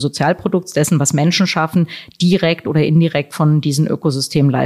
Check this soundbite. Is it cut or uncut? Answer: uncut